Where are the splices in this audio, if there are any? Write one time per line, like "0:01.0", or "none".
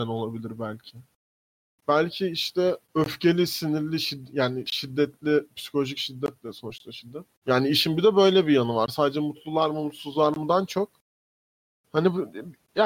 0:02.8
0:07.4